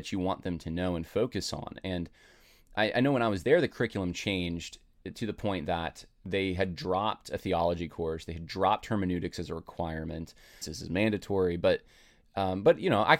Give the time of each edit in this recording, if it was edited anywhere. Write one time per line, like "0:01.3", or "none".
0:10.6